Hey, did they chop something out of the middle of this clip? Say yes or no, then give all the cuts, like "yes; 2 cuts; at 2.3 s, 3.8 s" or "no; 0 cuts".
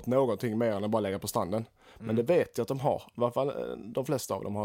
no; 0 cuts